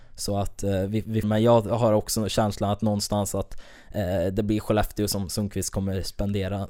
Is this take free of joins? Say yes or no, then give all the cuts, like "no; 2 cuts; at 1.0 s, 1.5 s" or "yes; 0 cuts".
no; 1 cut; at 1.2 s